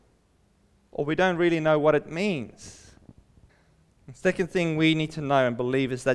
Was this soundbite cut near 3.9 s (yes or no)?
yes